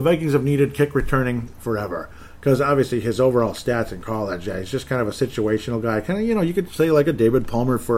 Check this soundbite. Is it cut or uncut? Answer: uncut